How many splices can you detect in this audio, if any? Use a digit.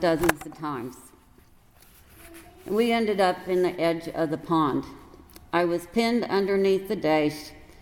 0